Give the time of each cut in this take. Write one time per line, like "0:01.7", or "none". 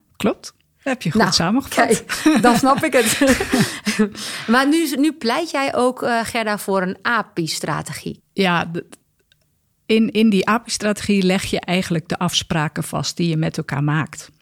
0:08.2